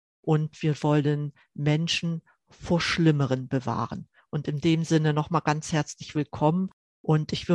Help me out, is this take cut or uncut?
uncut